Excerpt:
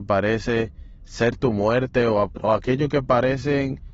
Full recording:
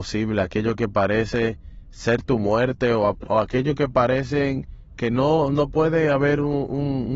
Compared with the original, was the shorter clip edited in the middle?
no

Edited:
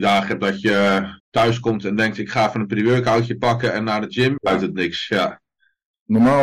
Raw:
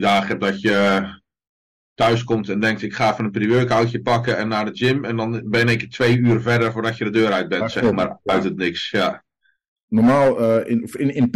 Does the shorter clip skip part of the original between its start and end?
yes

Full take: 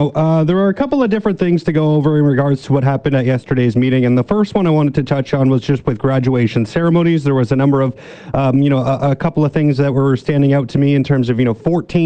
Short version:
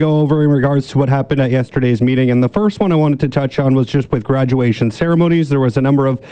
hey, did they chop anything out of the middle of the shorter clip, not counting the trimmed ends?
no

